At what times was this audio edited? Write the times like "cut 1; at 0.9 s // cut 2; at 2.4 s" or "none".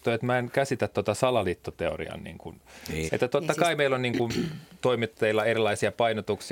cut 1; at 3.1 s